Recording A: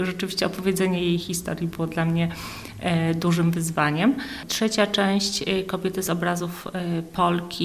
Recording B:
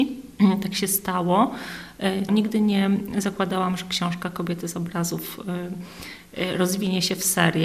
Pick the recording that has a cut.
B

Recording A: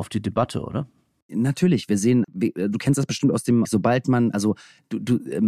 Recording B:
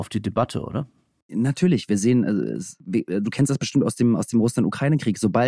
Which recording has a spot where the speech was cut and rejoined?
A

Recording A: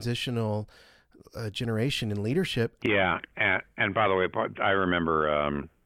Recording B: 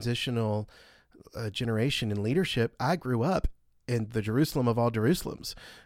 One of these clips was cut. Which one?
A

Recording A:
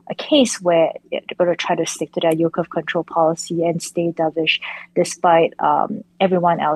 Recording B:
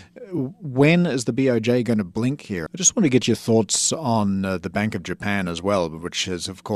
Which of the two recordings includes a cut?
B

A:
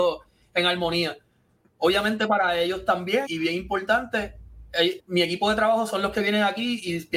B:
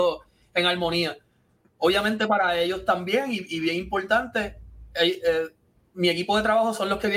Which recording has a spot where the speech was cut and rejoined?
A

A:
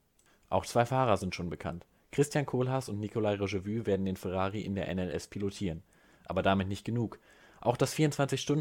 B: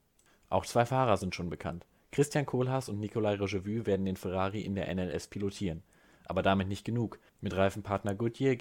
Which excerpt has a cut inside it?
B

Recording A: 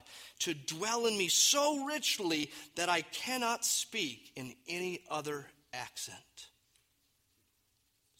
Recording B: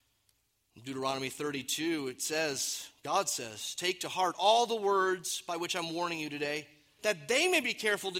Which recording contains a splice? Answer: B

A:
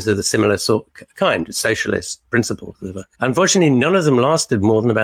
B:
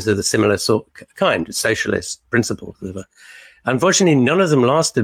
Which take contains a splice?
A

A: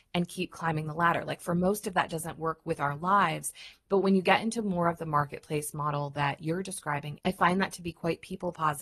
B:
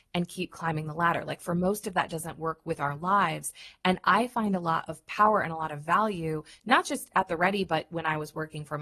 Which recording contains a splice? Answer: A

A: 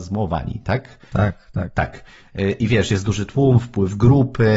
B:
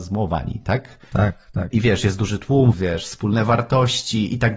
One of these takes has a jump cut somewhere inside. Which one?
B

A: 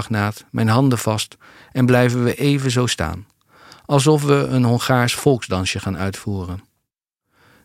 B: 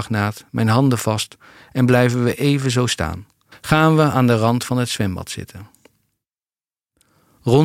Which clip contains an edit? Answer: B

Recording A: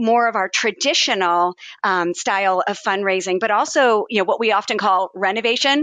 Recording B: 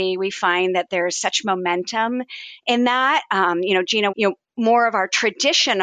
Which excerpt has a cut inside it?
B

